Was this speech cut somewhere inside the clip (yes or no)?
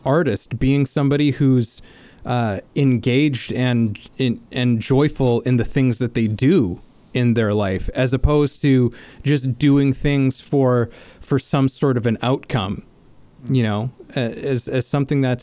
no